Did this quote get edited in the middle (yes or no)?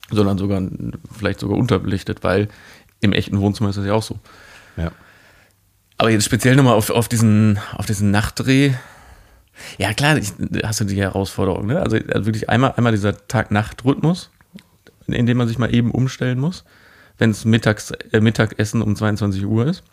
no